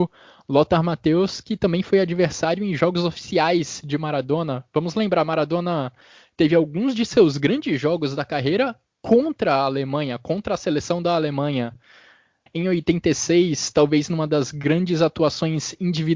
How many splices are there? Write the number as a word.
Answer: one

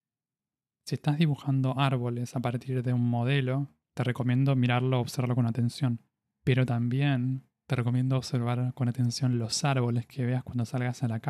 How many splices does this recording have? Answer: zero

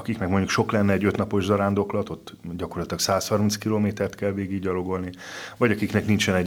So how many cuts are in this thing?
zero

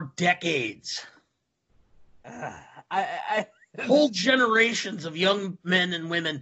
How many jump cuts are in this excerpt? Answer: zero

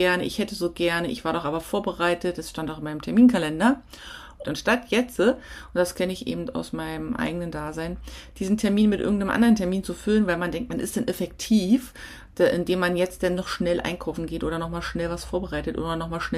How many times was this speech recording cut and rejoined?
one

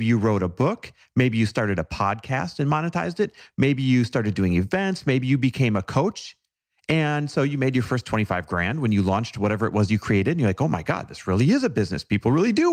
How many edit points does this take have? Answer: zero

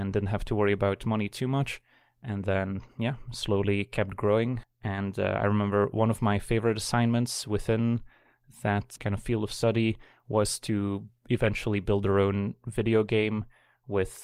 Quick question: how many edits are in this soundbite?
two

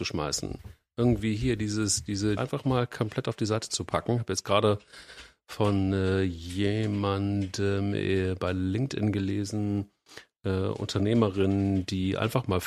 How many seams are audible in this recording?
one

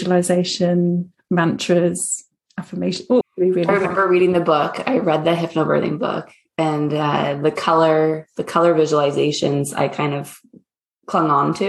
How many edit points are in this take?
one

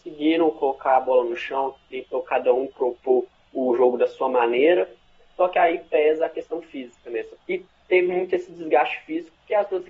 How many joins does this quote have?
one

